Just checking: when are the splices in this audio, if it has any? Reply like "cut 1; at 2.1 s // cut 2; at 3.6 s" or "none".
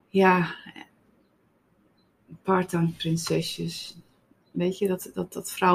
none